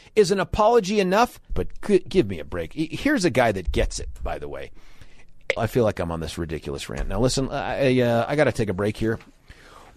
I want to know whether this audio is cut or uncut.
cut